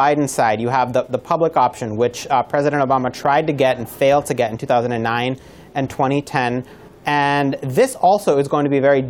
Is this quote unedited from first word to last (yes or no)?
yes